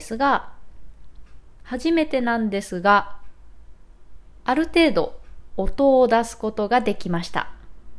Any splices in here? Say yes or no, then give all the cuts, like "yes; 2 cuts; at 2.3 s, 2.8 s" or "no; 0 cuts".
no; 0 cuts